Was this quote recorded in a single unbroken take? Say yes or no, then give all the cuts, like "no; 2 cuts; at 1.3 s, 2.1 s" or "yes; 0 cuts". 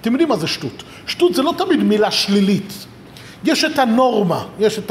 yes; 0 cuts